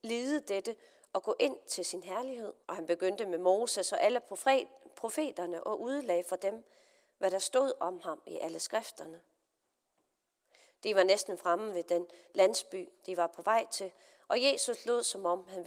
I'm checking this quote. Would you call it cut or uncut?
cut